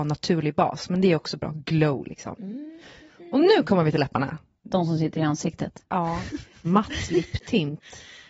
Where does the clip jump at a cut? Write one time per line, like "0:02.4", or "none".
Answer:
0:06.7